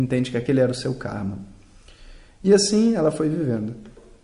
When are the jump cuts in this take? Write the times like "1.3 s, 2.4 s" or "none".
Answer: none